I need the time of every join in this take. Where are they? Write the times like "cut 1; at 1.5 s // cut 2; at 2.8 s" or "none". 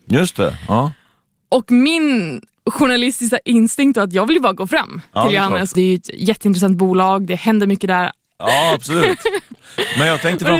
cut 1; at 5.7 s // cut 2; at 8.4 s